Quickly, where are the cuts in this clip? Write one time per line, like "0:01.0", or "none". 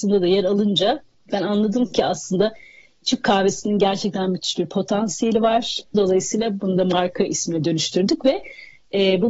0:05.9